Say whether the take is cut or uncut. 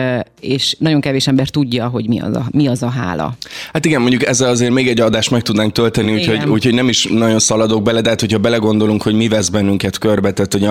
uncut